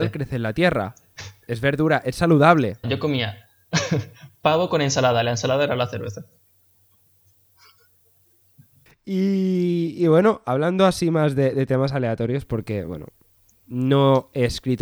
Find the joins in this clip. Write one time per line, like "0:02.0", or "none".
0:02.8